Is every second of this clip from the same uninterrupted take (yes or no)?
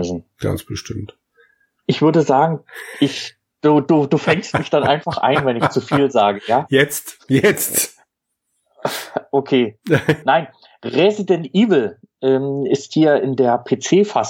no